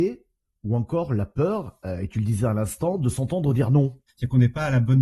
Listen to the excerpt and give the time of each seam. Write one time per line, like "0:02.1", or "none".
0:04.1

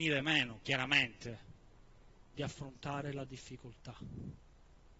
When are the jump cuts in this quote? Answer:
none

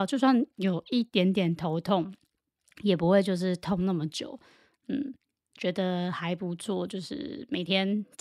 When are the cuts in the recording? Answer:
none

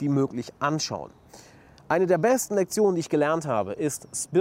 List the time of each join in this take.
none

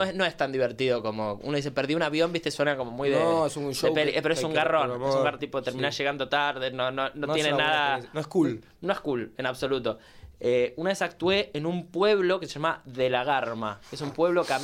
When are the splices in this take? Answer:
0:05.4

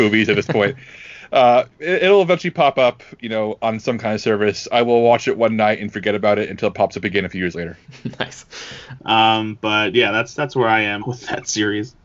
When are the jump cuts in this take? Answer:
0:09.0
0:11.0

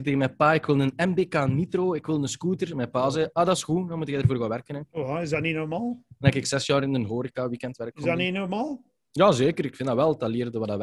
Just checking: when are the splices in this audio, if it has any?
none

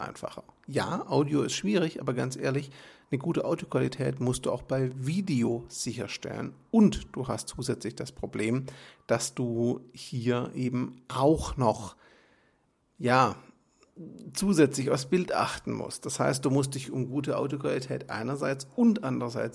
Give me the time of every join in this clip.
none

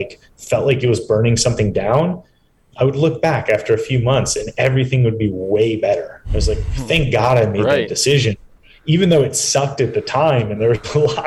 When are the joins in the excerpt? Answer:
none

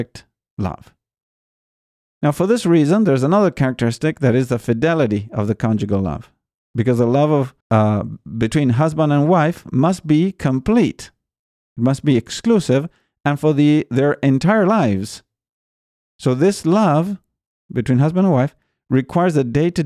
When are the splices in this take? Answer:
0:07.6

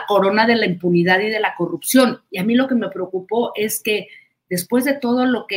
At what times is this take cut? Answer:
0:02.3

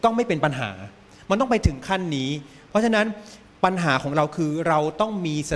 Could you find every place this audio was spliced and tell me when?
none

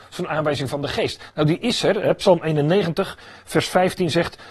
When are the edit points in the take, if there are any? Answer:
none

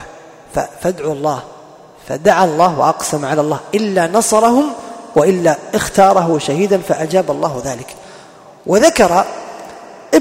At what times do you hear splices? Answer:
none

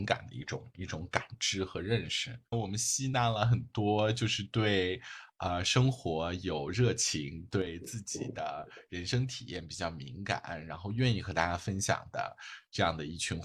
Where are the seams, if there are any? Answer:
0:02.5

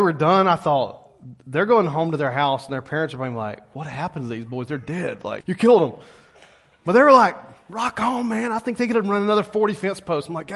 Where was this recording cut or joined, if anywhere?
0:05.4

